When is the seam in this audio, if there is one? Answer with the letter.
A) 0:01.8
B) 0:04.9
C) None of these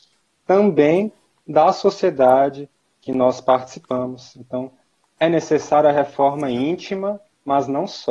C